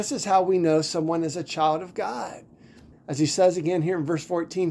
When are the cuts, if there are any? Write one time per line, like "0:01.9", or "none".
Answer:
0:02.9